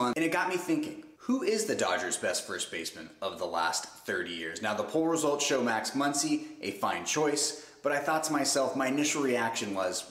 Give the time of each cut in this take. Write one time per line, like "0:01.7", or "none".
0:01.2